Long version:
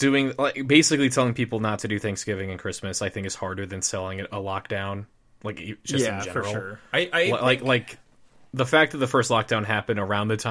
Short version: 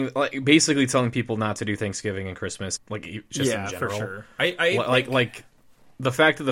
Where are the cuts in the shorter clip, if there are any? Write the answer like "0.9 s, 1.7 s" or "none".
2.8 s